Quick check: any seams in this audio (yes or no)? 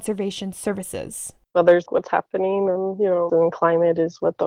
yes